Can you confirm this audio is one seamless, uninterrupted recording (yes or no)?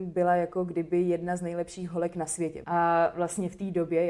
no